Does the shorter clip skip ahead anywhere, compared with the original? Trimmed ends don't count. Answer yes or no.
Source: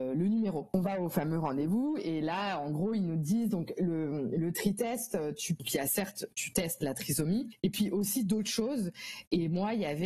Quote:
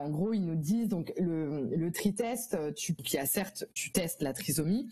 no